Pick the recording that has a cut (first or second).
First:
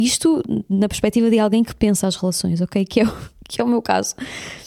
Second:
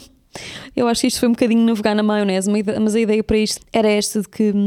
second